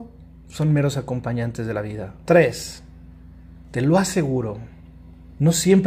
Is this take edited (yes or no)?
yes